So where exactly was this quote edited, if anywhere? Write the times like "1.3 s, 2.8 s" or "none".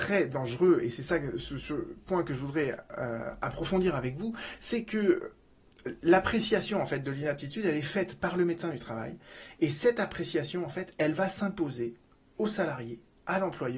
none

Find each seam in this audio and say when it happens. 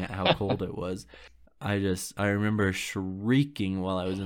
1.4 s

